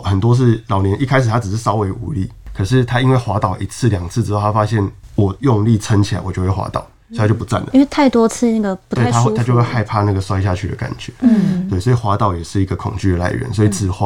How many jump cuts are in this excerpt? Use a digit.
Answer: 1